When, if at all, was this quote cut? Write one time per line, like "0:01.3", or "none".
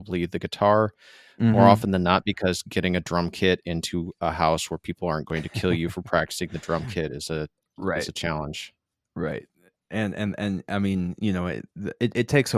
none